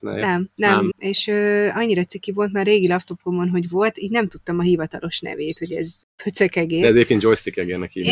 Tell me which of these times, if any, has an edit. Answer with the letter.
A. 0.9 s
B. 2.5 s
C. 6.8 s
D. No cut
A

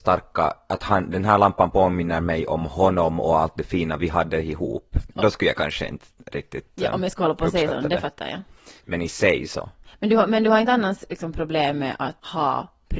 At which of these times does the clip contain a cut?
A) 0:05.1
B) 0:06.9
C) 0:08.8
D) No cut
C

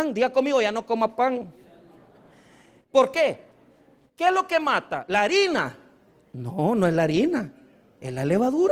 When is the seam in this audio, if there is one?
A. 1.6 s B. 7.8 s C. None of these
C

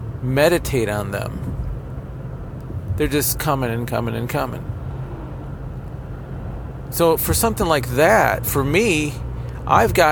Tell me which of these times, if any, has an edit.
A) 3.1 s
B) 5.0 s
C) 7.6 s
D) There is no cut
D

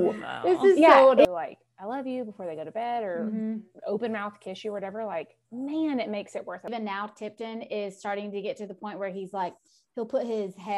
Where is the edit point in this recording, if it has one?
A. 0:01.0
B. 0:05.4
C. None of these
B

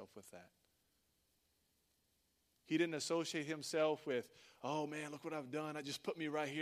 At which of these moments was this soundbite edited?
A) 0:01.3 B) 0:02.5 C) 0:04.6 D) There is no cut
D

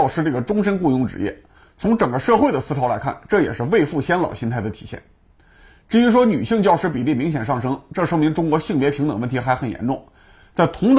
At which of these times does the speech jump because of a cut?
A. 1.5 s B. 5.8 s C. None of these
C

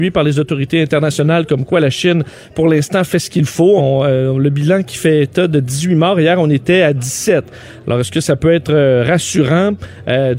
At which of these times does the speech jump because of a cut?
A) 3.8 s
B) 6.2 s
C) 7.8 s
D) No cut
A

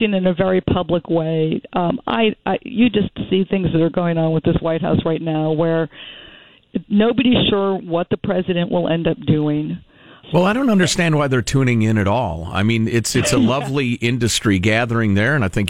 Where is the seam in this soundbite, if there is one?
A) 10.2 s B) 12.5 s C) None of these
A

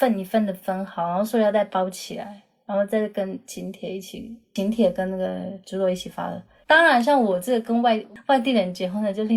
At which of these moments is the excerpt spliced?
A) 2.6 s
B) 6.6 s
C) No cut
B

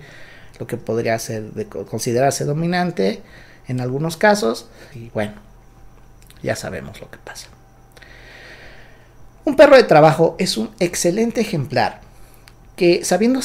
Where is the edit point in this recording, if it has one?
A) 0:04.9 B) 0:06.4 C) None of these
A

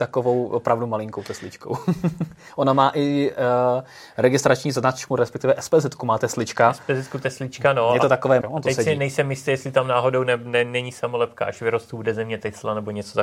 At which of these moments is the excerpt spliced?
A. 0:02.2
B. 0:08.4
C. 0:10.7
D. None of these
B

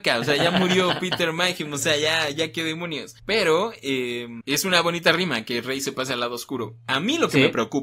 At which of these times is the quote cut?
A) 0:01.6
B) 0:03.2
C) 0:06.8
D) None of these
B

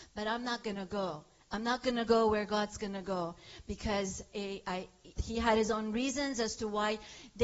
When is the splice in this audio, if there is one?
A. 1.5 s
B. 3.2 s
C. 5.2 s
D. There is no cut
C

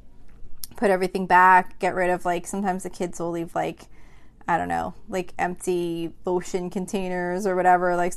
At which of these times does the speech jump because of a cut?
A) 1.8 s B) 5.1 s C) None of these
C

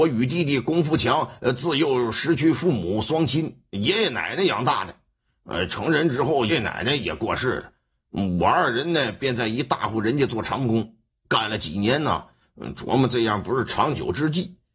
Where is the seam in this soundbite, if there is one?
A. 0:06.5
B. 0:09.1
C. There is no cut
A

